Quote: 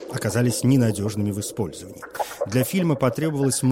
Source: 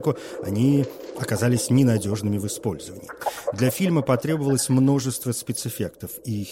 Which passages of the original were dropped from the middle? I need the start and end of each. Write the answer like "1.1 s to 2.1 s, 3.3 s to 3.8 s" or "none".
none